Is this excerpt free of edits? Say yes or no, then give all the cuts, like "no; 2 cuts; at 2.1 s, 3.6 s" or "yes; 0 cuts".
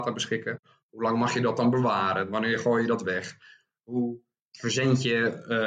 yes; 0 cuts